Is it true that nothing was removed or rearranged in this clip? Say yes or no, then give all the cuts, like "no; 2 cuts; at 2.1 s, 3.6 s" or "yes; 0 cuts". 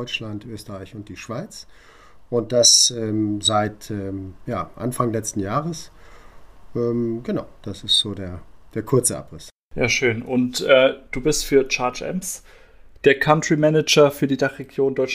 yes; 0 cuts